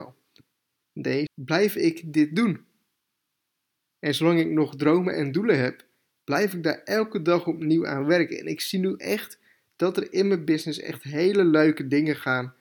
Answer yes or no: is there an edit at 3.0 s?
no